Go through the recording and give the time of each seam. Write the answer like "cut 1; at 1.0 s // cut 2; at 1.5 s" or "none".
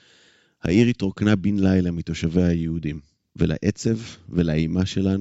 cut 1; at 3.3 s